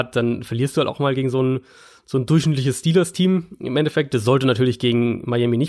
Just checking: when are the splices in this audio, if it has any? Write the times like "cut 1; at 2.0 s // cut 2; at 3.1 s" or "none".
none